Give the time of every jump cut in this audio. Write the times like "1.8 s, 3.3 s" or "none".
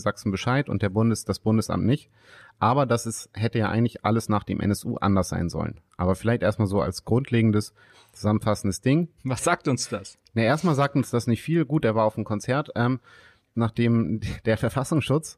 9.2 s, 13.5 s